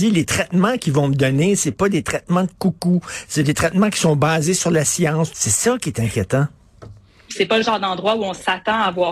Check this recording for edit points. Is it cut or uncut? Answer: cut